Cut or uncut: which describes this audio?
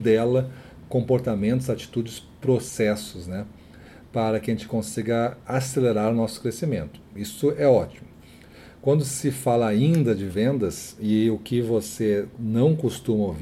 uncut